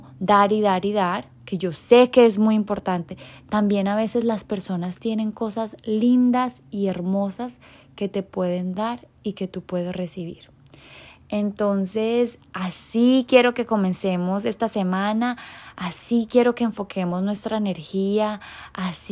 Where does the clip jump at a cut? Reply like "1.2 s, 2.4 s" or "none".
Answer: none